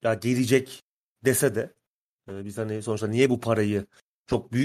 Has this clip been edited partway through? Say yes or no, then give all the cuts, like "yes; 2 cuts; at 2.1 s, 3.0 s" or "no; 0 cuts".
no; 0 cuts